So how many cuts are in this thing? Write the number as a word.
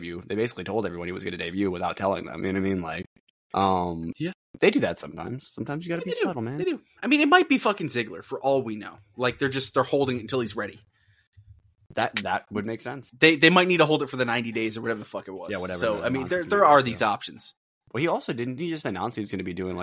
zero